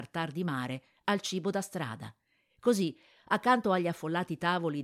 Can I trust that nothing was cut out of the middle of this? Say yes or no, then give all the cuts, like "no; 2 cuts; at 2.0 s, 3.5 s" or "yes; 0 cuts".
yes; 0 cuts